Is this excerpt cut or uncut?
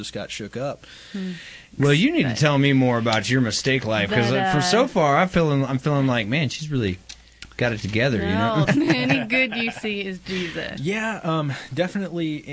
cut